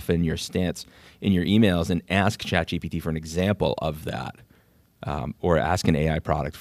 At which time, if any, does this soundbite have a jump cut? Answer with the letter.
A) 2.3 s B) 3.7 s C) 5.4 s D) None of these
D